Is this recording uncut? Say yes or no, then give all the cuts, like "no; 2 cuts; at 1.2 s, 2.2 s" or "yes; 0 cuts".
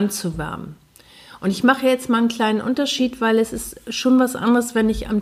yes; 0 cuts